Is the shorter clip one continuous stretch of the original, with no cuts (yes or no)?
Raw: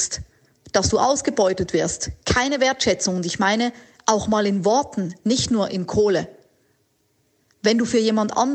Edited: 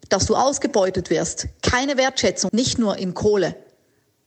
no